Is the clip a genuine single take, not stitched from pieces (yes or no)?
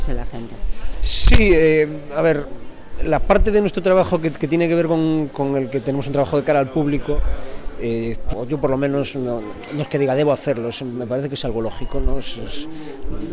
no